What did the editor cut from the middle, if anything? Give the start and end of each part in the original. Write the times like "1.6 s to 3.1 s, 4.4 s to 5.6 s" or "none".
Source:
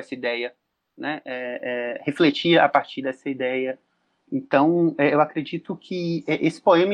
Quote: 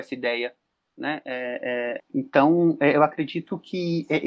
2.0 s to 4.2 s